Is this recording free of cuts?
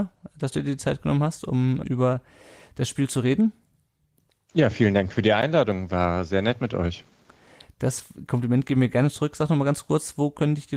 no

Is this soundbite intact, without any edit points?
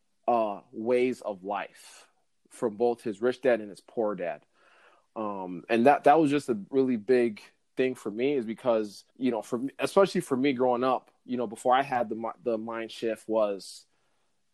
no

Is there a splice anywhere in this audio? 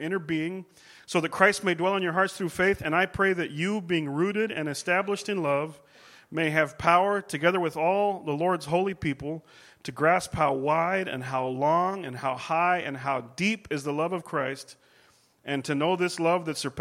no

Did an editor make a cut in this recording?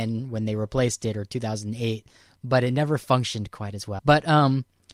yes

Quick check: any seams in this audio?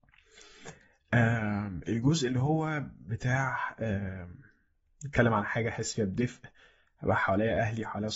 no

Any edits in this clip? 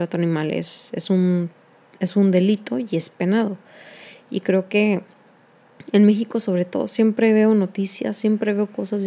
no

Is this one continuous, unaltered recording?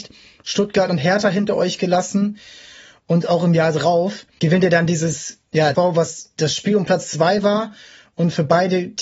no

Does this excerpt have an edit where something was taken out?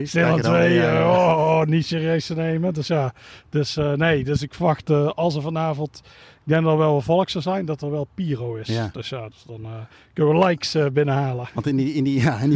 no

